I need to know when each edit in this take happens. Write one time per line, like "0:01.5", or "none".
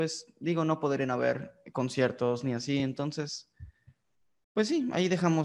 none